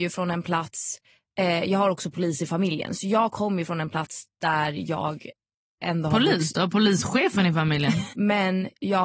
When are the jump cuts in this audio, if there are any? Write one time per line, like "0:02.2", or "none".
0:08.1